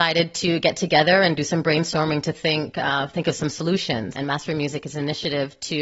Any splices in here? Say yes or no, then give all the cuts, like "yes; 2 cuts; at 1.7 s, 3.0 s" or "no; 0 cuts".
yes; 1 cut; at 4.1 s